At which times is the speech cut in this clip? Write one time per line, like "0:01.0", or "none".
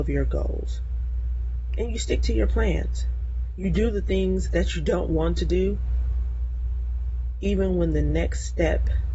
none